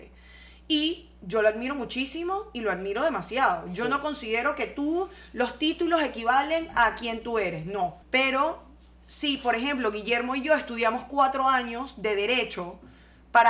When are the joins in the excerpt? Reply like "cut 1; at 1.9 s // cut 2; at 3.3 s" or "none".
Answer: cut 1; at 8.0 s